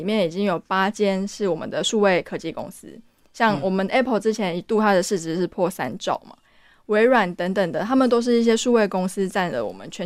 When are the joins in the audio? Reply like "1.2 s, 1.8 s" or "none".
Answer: none